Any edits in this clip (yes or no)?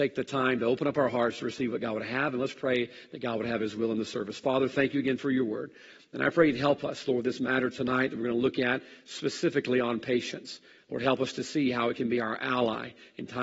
no